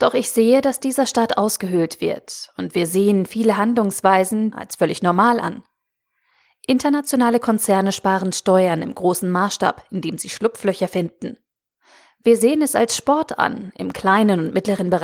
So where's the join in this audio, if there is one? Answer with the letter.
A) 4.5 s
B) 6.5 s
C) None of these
A